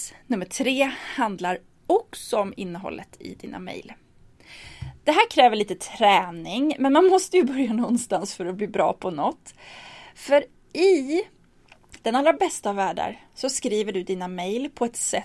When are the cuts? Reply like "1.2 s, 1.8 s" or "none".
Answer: none